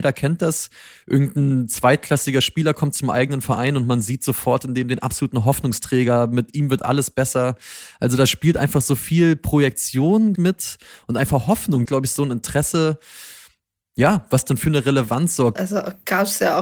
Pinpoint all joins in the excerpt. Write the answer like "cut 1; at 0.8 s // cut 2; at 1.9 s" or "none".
cut 1; at 10.4 s // cut 2; at 11.9 s // cut 3; at 15.6 s